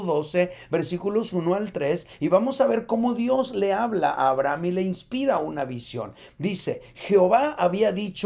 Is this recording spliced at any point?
no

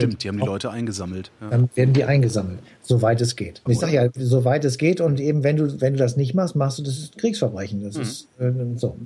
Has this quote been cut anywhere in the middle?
yes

